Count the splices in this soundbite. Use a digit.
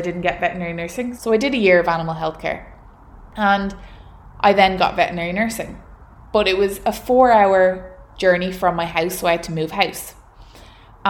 1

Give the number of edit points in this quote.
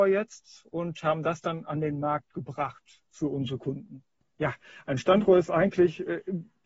1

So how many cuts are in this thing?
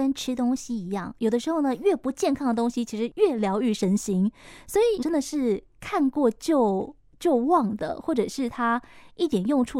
1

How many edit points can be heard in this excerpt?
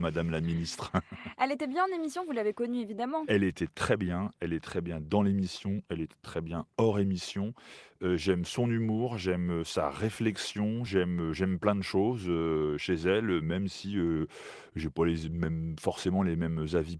0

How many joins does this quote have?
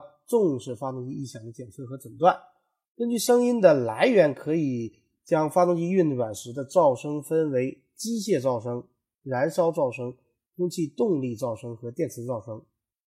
1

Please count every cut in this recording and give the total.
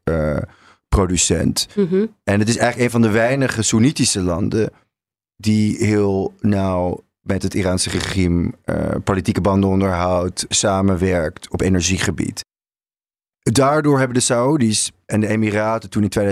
2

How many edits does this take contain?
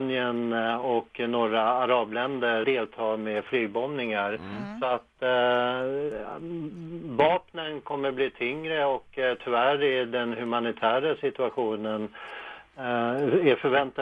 1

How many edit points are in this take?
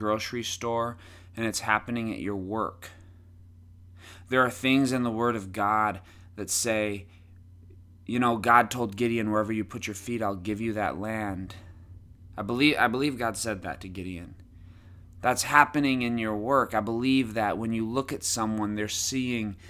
0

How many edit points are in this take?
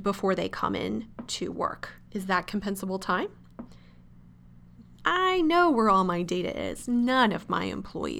2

